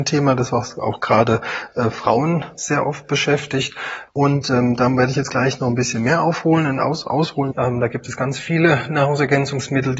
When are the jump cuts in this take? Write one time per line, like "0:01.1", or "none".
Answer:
0:04.1
0:07.5